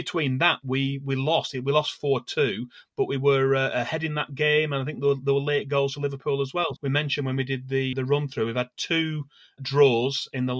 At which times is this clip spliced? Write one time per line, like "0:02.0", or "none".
0:06.8
0:07.9
0:09.6